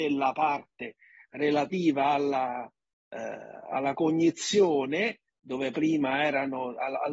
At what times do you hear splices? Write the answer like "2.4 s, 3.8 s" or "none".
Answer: none